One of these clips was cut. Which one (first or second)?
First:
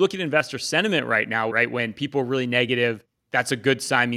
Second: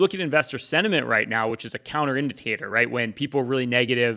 first